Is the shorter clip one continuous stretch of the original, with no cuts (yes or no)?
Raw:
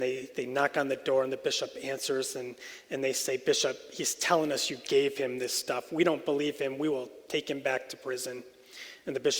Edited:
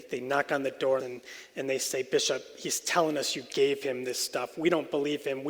no